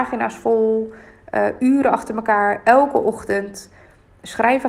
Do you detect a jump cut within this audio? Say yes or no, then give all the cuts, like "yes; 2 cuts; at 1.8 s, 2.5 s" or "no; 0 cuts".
no; 0 cuts